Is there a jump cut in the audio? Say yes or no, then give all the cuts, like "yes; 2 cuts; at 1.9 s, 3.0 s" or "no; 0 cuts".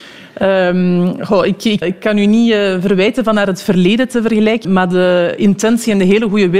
yes; 2 cuts; at 1.8 s, 4.6 s